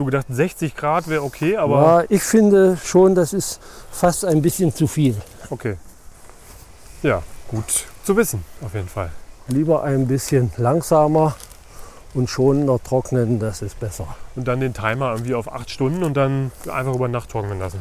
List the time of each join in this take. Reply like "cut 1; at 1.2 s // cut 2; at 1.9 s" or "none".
cut 1; at 2.0 s